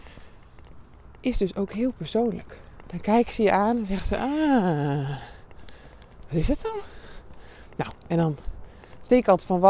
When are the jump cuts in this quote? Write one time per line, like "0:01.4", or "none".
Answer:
0:02.8